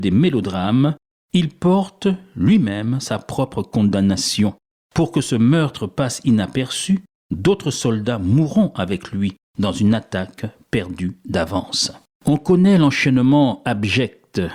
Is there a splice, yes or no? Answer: no